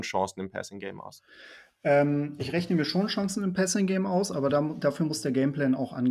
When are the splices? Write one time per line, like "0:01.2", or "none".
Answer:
none